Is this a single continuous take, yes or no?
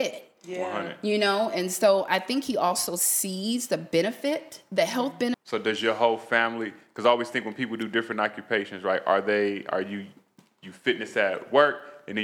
no